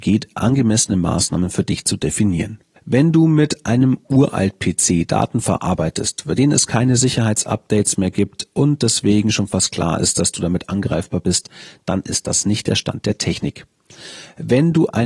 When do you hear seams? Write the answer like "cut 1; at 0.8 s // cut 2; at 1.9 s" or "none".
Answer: cut 1; at 2.8 s